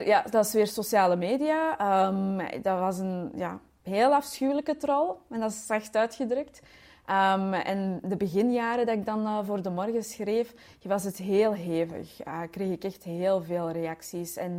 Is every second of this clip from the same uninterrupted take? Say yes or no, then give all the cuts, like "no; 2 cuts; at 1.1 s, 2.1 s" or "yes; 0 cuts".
yes; 0 cuts